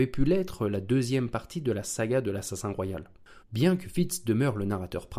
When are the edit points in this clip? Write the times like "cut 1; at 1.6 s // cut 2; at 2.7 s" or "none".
cut 1; at 3.4 s